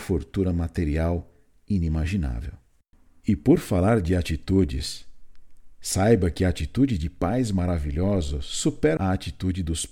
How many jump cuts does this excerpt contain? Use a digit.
1